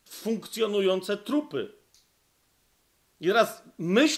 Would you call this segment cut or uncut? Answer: uncut